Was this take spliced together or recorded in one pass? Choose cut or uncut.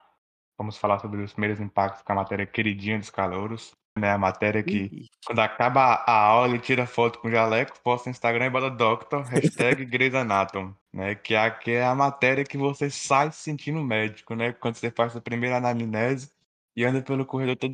cut